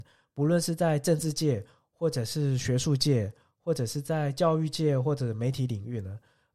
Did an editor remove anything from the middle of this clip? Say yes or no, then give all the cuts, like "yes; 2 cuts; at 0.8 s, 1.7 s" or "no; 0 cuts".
no; 0 cuts